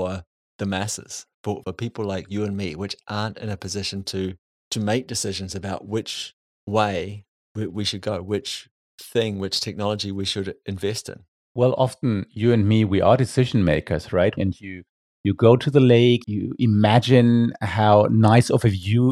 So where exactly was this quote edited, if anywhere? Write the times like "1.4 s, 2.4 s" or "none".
1.6 s, 14.4 s, 16.2 s

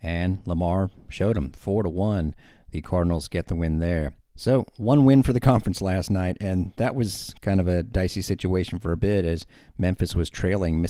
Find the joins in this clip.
none

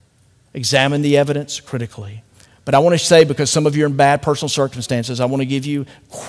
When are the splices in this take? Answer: none

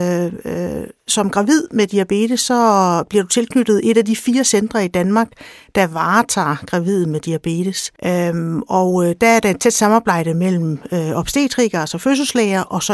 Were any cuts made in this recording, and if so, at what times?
8.0 s

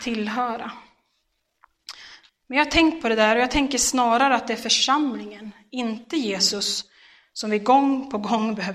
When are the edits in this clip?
2.3 s

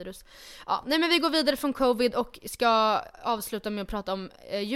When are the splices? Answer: none

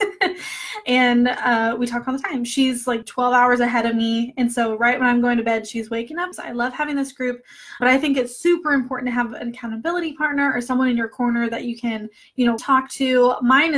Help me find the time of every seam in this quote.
6.3 s, 7.8 s, 12.6 s

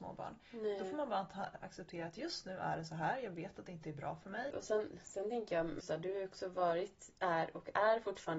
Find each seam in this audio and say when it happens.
4.5 s, 5.8 s

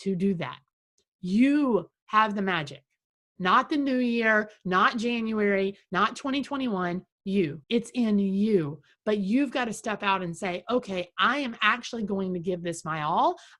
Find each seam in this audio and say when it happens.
7.6 s

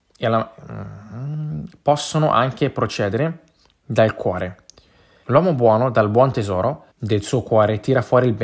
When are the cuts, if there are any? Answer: 5.2 s, 6.9 s

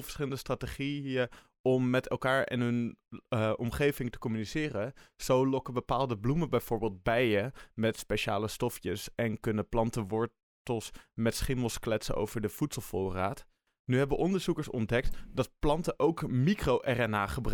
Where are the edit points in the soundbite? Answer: none

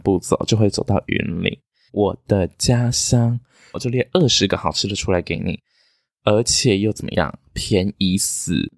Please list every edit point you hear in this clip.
1.9 s, 3.7 s

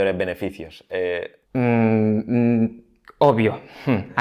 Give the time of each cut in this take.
1.4 s

